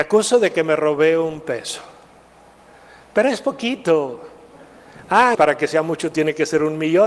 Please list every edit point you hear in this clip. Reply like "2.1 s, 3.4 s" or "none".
5.3 s